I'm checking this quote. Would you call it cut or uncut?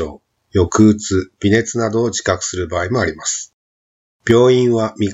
uncut